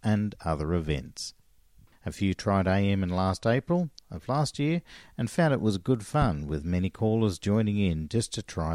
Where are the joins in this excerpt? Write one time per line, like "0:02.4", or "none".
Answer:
0:01.9